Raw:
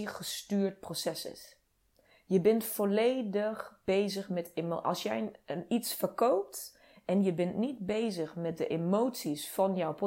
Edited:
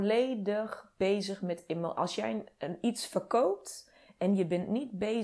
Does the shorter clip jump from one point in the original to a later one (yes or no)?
no